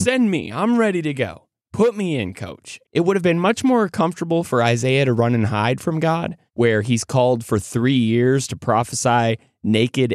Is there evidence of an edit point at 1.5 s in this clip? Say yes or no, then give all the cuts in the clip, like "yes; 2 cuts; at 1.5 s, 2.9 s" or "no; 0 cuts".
no; 2 cuts; at 2.8 s, 6.5 s